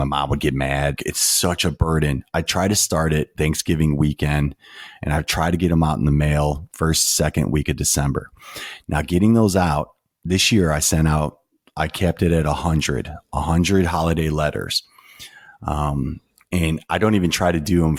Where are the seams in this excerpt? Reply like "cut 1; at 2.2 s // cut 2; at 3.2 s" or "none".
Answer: cut 1; at 1.0 s